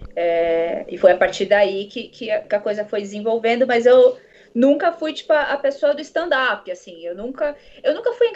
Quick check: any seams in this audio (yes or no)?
no